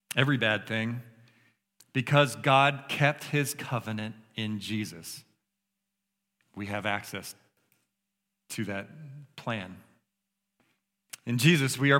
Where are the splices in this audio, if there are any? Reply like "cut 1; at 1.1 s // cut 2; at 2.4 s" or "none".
none